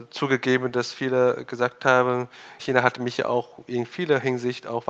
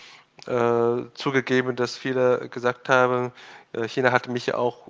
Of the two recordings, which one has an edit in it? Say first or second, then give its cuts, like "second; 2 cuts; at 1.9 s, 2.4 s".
first; 1 cut; at 2.6 s